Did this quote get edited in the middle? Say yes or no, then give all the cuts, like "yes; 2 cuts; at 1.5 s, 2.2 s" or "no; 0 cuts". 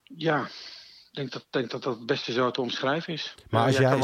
no; 0 cuts